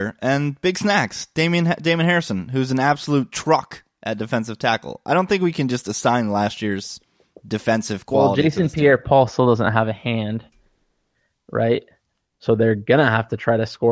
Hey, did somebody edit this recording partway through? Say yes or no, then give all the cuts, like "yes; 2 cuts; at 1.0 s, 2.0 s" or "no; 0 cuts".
yes; 1 cut; at 12.3 s